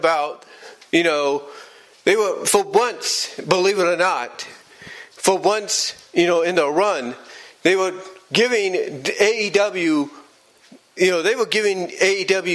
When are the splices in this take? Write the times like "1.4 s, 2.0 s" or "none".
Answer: none